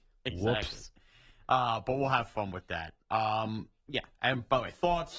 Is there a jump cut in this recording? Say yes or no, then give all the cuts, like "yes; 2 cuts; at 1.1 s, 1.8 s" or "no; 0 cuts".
no; 0 cuts